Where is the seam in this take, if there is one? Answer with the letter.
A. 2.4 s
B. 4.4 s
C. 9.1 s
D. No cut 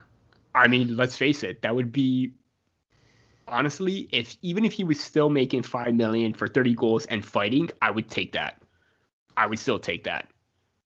D